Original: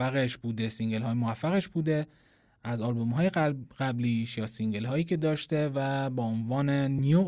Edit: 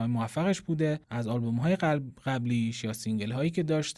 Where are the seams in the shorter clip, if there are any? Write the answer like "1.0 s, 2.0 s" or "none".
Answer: 1.0 s